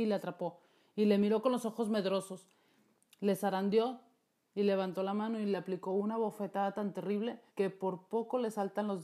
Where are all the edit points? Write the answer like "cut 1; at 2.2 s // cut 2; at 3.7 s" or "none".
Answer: cut 1; at 4.5 s // cut 2; at 7.5 s